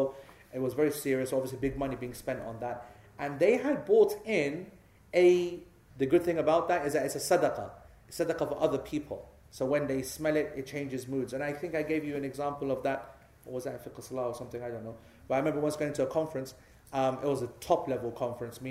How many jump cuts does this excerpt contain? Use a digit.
1